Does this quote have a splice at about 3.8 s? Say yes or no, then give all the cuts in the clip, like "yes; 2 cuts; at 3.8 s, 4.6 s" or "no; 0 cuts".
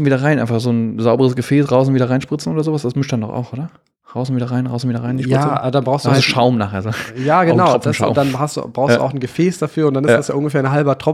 no; 0 cuts